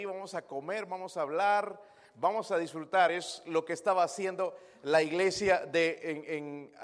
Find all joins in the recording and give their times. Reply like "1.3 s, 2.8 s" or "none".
none